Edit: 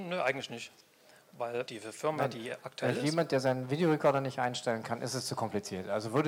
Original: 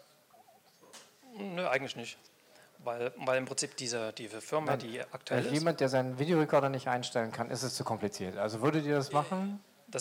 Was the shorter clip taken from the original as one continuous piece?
no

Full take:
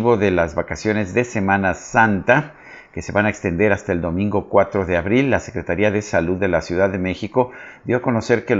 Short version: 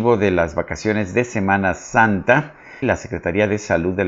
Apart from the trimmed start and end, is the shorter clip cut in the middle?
yes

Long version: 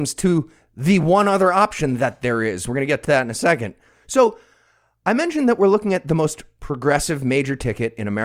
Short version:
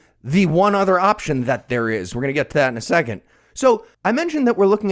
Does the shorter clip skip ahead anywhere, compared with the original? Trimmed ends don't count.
yes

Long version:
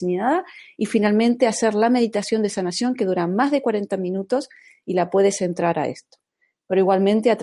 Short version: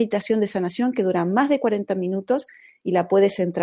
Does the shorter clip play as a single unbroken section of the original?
yes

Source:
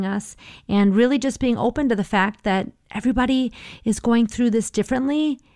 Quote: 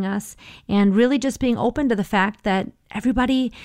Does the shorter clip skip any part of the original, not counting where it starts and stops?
no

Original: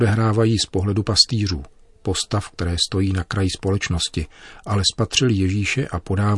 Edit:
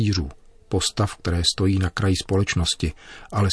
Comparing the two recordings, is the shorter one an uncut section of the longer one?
yes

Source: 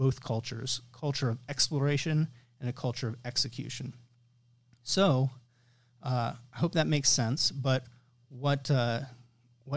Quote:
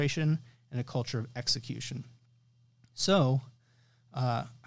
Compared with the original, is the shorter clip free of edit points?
yes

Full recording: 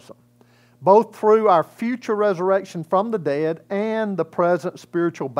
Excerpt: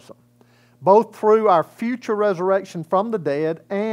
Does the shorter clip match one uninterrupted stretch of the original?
yes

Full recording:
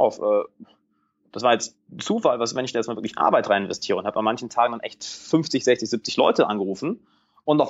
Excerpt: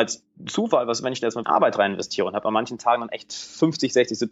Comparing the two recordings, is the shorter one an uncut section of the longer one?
no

